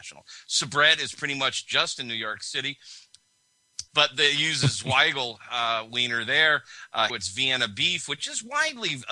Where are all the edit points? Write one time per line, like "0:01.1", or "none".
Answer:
0:03.9
0:07.1